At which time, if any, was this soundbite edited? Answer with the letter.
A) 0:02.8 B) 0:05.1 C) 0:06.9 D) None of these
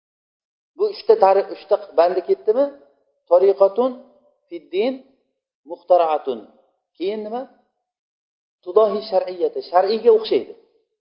D